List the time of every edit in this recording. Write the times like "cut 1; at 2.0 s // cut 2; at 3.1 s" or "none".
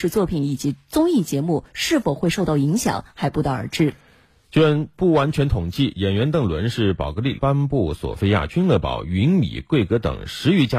cut 1; at 7.4 s